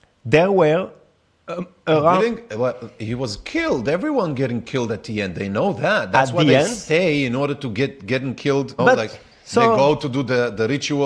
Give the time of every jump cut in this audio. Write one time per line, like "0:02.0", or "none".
0:08.8